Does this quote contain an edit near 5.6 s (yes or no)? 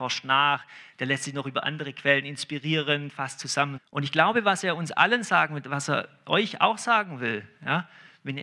no